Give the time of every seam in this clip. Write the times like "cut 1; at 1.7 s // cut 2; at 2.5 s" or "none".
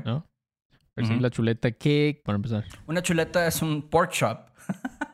cut 1; at 2.3 s